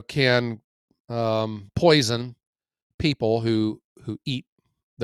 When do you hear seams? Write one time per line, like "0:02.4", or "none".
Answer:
none